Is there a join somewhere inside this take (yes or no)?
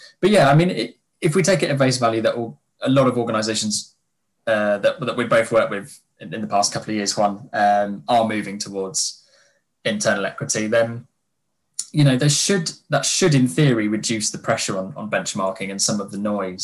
yes